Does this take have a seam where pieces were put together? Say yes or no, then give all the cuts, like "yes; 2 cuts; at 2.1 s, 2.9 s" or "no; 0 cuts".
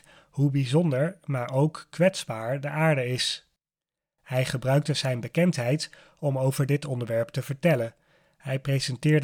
no; 0 cuts